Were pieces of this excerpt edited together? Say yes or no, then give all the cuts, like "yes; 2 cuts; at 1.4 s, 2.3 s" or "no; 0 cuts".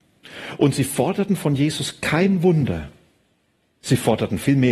no; 0 cuts